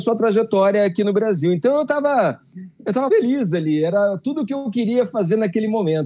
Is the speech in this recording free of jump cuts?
no; 1 cut; at 3.1 s

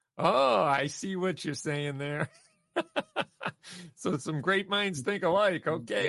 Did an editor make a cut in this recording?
no; 0 cuts

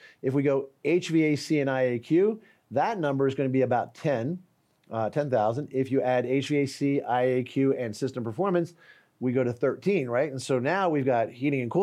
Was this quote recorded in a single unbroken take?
yes; 0 cuts

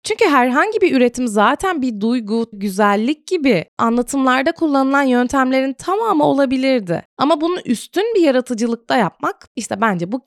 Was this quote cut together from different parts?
yes; 1 cut; at 2.5 s

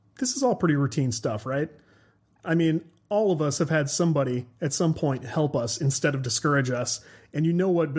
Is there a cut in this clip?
no; 0 cuts

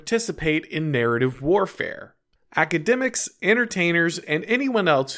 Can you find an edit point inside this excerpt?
yes; 2 cuts; at 2.4 s, 4.2 s

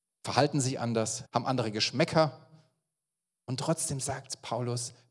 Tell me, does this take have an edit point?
yes; 1 cut; at 1.2 s

